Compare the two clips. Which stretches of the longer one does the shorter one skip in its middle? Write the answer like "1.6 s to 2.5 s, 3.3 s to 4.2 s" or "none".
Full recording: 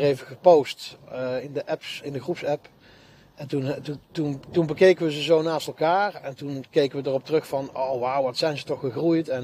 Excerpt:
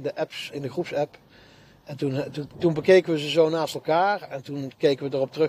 4.0 s to 4.4 s